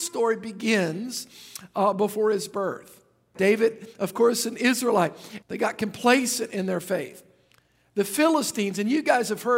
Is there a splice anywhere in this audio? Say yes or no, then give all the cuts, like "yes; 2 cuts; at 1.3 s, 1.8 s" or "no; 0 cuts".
yes; 2 cuts; at 3.3 s, 5.4 s